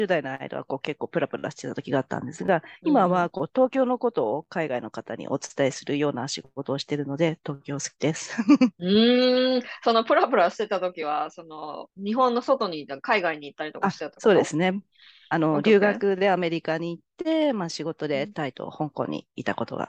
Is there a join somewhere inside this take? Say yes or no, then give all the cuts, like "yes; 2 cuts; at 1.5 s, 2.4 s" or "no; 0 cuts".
yes; 2 cuts; at 2.8 s, 11.9 s